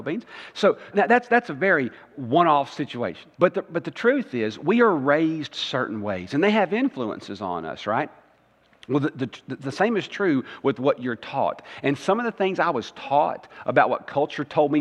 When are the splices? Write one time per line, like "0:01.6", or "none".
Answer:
0:00.9
0:03.3